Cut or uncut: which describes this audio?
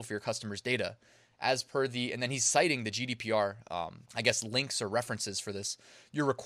cut